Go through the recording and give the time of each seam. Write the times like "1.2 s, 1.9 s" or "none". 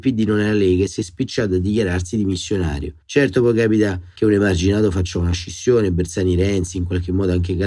none